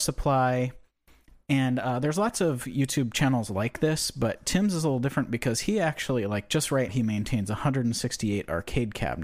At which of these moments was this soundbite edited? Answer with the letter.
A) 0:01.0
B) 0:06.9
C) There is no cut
B